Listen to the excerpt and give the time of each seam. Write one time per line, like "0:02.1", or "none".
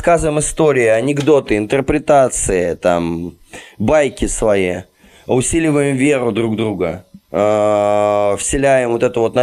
none